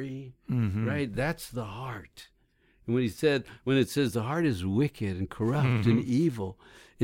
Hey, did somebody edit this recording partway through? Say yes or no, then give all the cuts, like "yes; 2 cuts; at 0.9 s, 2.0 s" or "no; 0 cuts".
no; 0 cuts